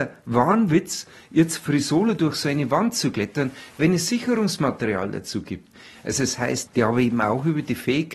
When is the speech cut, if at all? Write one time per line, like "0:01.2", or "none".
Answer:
0:06.7